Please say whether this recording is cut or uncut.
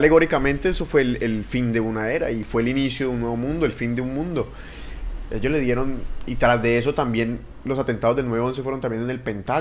cut